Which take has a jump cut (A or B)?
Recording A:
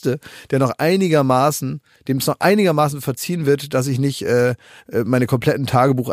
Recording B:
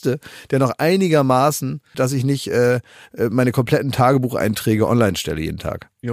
B